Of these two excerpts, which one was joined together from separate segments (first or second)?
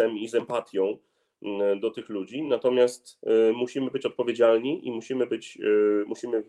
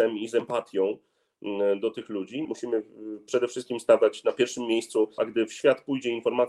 second